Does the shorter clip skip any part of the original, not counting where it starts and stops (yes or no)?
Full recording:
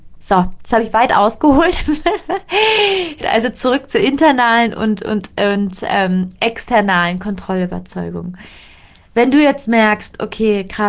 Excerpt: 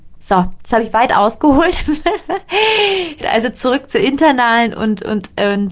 no